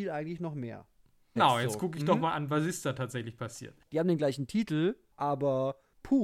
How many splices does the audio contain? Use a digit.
2